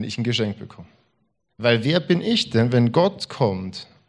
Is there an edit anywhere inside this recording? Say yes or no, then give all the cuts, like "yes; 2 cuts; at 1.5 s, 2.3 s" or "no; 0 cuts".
yes; 1 cut; at 1.5 s